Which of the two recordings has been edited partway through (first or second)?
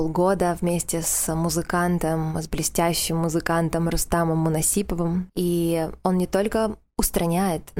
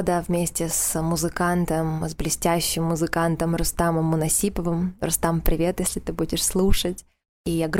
first